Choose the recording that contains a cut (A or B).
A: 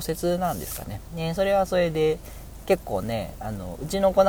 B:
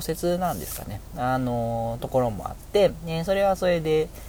A